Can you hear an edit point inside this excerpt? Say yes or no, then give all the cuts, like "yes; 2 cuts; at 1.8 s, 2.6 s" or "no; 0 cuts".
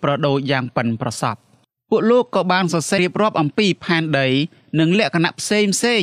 yes; 1 cut; at 3.0 s